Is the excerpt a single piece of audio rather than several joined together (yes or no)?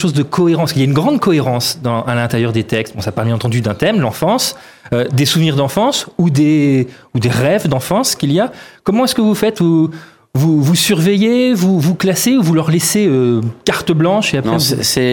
yes